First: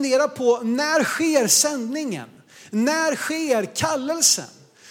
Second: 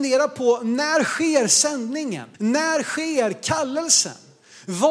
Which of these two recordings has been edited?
second; 1 cut; at 2.3 s

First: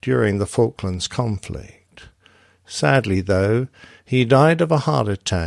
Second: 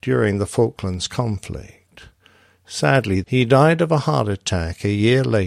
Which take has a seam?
second; 1 cut; at 3.2 s

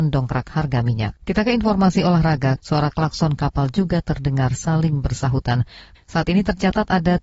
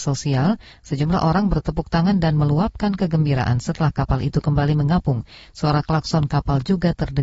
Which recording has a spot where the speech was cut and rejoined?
first; 3 cuts; at 1.2 s, 2.6 s, 5.9 s

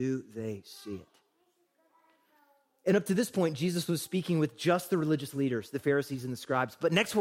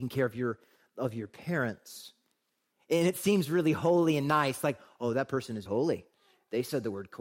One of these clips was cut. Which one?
second; 2 cuts; at 2.7 s, 5.7 s

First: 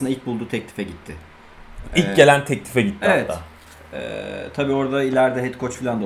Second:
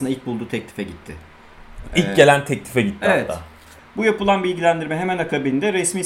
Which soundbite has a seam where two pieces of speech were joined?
second; 1 cut; at 3.8 s

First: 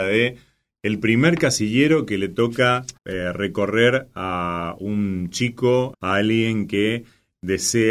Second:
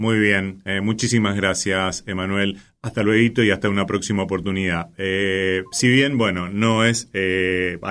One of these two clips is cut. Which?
first; 2 cuts; at 3.0 s, 5.9 s

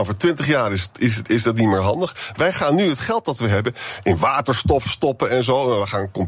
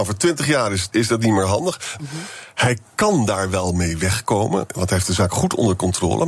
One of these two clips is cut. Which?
second; 2 cuts; at 0.9 s, 2.0 s

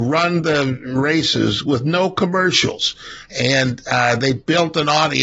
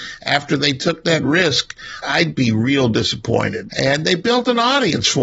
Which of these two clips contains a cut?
second; 2 cuts; at 2.0 s, 3.7 s

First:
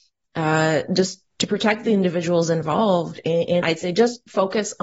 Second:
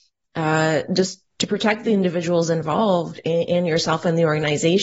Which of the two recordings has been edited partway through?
first; 1 cut; at 3.6 s

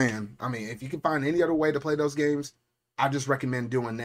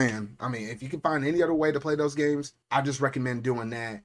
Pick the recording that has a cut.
second; 1 cut; at 2.6 s

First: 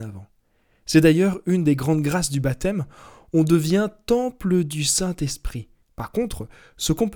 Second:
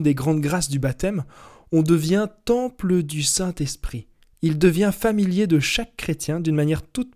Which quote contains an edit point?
first; 1 cut; at 5.8 s

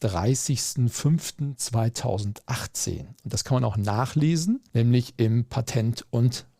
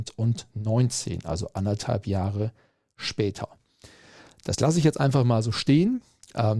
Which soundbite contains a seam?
first; 2 cuts; at 3.2 s, 4.7 s

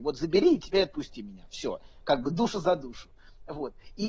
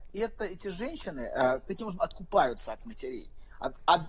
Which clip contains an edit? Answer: second; 1 cut; at 1.6 s

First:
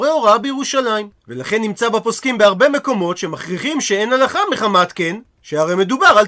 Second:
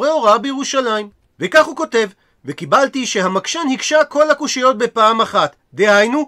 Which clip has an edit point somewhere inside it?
first; 1 cut; at 1.2 s

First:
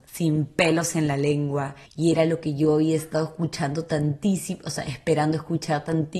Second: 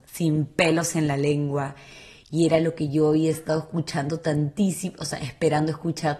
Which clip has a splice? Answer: first; 1 cut; at 1.8 s

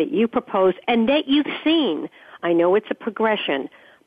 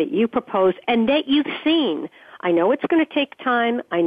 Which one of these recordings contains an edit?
first; 1 cut; at 2.4 s

